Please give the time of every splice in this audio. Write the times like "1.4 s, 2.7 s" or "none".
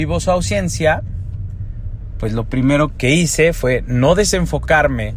3.0 s